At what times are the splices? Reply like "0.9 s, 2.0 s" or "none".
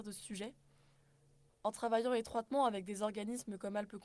1.5 s